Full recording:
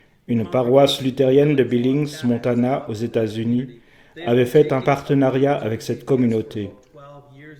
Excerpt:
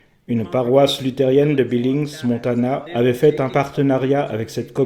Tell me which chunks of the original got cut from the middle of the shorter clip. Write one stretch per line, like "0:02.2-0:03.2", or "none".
0:02.9-0:04.2